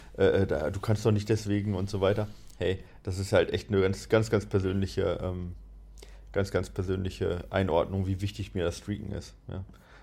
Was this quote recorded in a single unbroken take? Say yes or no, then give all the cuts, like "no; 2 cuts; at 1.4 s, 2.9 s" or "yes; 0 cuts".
yes; 0 cuts